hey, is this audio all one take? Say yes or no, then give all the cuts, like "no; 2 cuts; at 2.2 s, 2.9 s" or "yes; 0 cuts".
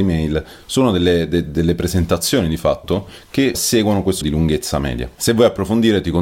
no; 1 cut; at 4.2 s